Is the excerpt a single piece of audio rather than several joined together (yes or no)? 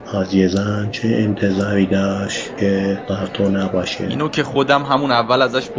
yes